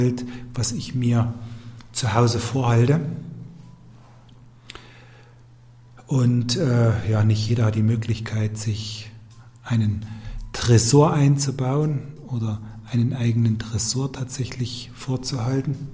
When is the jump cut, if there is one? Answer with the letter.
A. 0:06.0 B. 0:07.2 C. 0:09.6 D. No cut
D